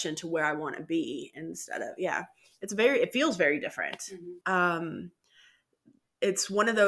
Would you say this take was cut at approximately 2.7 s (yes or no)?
no